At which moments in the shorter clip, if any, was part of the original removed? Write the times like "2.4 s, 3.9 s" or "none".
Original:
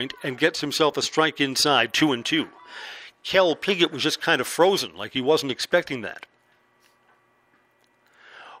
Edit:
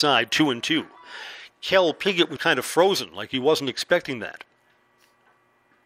2.4 s